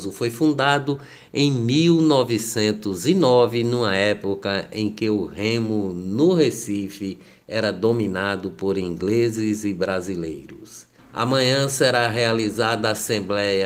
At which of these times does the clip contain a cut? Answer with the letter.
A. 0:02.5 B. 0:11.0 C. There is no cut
B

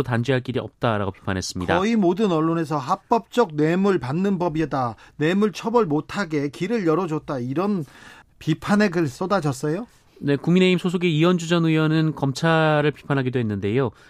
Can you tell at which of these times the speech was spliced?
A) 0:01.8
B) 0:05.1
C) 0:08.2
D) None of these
C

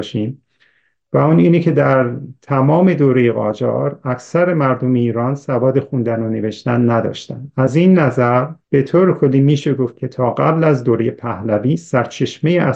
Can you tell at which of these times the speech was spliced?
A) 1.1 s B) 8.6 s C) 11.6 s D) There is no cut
B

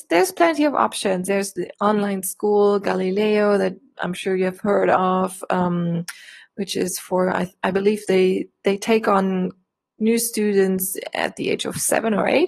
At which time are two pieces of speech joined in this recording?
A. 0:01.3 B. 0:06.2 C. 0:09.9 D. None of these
A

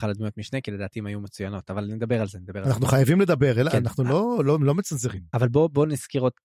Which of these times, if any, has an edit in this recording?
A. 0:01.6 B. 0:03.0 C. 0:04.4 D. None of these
D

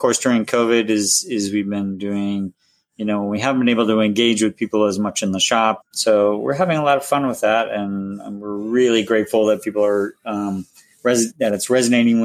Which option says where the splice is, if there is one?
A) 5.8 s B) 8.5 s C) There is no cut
A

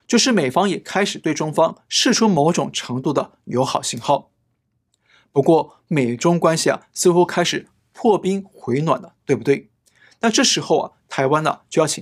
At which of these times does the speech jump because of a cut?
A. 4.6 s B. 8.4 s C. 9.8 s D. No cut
D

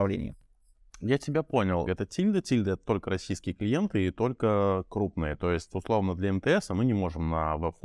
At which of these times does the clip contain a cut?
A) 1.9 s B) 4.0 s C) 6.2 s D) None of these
A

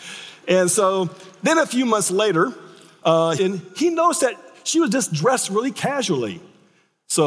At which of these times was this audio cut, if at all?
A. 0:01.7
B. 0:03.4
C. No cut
B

